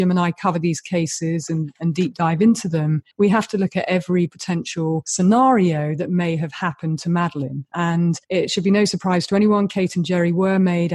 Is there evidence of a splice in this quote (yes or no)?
yes